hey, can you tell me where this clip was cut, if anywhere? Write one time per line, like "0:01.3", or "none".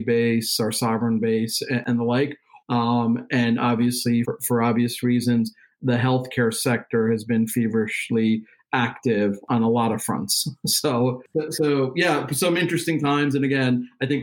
0:02.6
0:04.2